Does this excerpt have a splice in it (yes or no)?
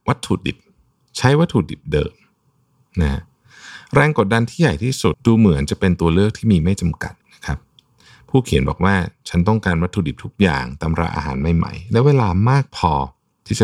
yes